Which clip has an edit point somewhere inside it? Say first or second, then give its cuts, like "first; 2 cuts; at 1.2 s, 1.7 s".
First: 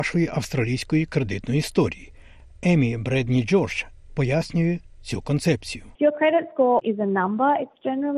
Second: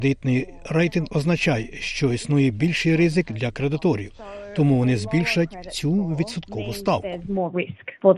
first; 2 cuts; at 4.1 s, 5.9 s